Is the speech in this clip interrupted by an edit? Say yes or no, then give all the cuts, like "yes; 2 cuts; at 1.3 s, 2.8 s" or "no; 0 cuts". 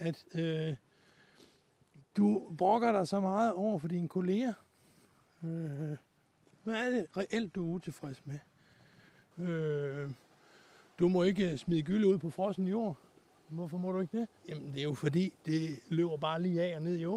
yes; 2 cuts; at 9.3 s, 14.4 s